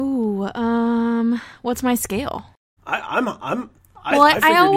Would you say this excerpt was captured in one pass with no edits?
no; 1 cut; at 2.8 s

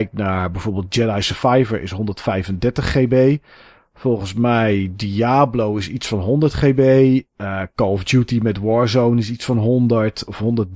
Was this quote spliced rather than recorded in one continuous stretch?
no; 0 cuts

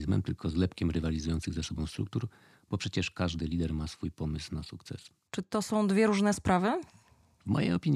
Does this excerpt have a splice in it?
yes; 1 cut; at 5.3 s

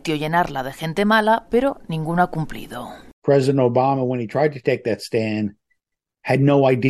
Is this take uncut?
yes; 0 cuts

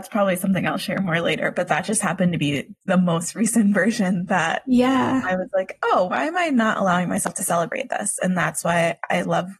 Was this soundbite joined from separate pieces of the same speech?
no; 0 cuts

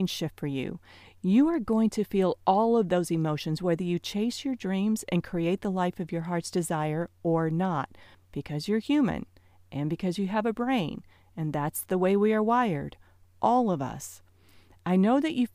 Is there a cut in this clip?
yes; 1 cut; at 8.1 s

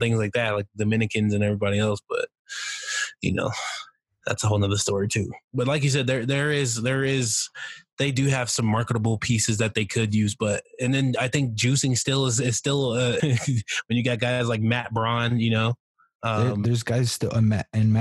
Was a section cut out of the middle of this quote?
yes; 1 cut; at 13.2 s

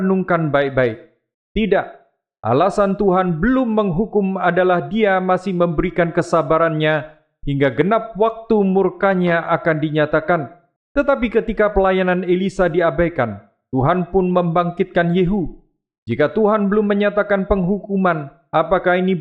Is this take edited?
yes; 3 cuts; at 1.3 s, 10.8 s, 16.0 s

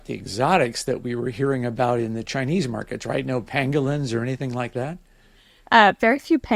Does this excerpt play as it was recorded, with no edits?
yes; 0 cuts

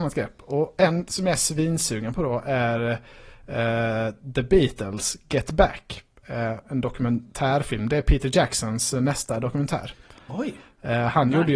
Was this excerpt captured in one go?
no; 1 cut; at 6.6 s

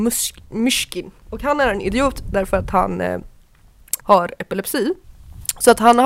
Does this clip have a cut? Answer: yes; 1 cut; at 4.0 s

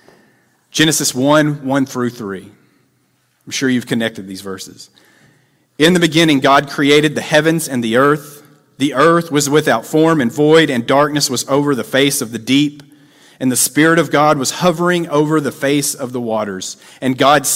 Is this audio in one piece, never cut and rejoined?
yes; 0 cuts

